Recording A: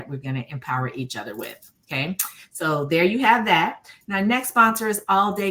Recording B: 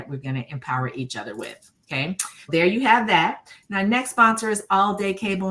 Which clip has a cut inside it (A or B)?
B